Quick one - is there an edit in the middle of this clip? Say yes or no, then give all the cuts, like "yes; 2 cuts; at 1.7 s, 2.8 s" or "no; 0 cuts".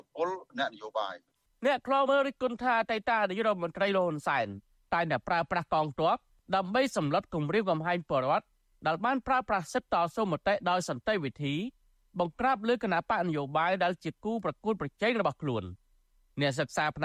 yes; 1 cut; at 2.1 s